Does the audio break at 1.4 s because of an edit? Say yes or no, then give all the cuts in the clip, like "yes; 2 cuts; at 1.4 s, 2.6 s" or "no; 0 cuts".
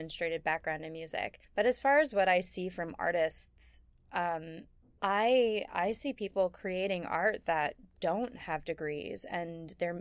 yes; 2 cuts; at 1.4 s, 5.0 s